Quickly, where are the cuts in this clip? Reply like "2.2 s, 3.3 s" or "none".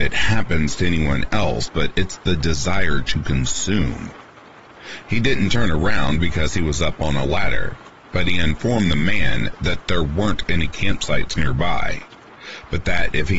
5.0 s